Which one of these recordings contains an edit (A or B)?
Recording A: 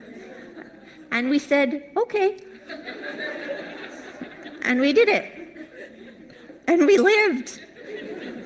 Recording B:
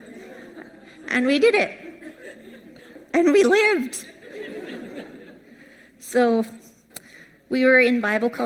B